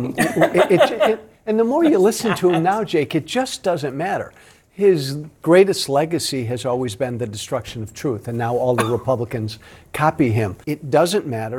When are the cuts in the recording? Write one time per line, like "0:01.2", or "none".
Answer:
0:10.6